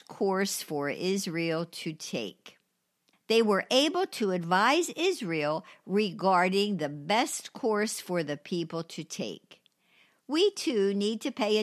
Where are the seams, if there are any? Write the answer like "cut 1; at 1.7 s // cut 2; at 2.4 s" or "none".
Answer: cut 1; at 3.1 s